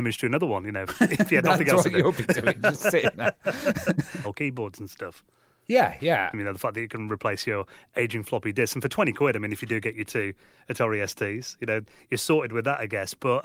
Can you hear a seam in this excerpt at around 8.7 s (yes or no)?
no